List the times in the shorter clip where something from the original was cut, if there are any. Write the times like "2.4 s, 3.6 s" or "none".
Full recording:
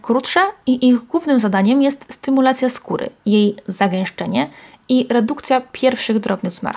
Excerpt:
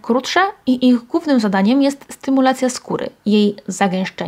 none